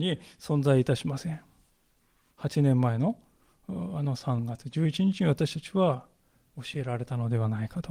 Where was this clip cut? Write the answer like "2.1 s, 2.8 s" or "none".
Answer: 2.3 s